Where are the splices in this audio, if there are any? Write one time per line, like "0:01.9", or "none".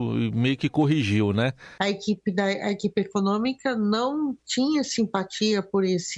0:01.8

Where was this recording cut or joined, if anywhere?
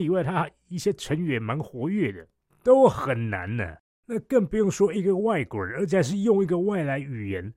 0:02.5

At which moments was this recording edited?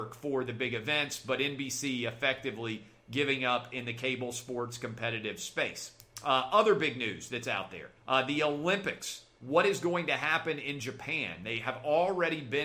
0:08.0

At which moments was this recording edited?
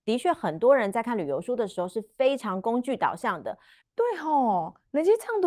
0:03.8

